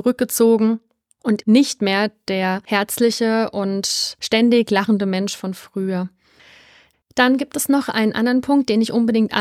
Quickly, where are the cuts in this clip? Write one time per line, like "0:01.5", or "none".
0:01.4
0:06.9